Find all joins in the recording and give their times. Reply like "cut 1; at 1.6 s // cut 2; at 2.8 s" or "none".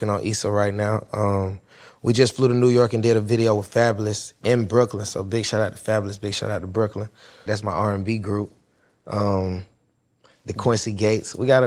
cut 1; at 7.5 s

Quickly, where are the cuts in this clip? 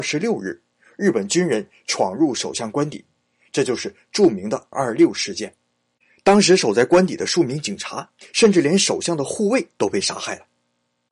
cut 1; at 4.7 s

